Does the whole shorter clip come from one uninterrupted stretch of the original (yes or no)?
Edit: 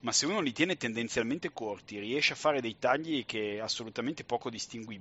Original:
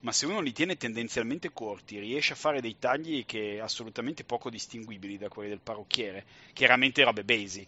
yes